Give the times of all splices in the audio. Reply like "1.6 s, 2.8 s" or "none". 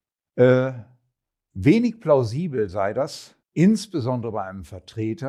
3.4 s